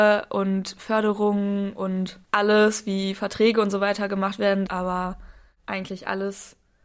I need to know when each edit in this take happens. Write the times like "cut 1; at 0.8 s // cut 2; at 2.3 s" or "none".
cut 1; at 2.2 s // cut 2; at 4.7 s